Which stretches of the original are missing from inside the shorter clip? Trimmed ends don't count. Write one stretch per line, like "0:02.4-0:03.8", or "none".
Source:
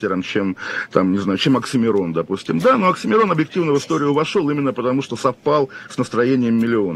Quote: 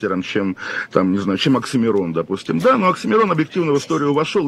none